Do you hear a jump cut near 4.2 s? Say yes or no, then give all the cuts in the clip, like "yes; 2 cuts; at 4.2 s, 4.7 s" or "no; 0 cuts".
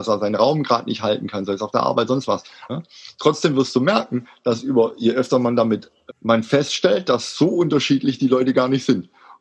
no; 2 cuts; at 2.7 s, 6.1 s